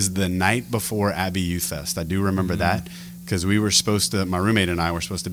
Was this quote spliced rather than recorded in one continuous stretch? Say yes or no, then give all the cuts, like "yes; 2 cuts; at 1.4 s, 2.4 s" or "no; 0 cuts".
no; 0 cuts